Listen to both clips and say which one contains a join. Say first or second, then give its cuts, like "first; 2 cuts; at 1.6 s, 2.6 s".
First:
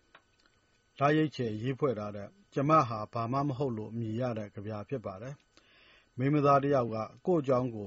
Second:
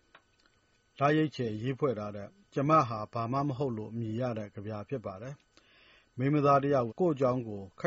second; 1 cut; at 6.9 s